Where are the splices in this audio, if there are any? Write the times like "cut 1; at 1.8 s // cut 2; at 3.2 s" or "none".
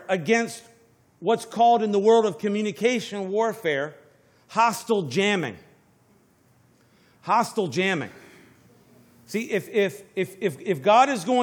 none